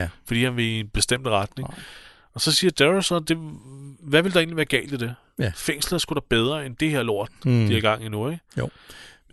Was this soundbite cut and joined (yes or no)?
no